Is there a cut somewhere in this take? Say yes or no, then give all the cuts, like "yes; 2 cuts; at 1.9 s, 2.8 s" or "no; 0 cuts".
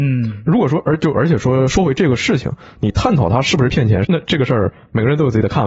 yes; 1 cut; at 4.0 s